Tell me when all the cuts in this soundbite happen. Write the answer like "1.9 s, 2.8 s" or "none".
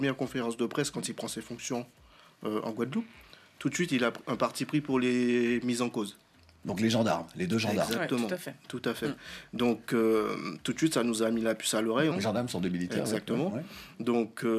12.1 s